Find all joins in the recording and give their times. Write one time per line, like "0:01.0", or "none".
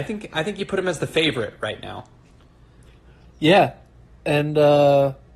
none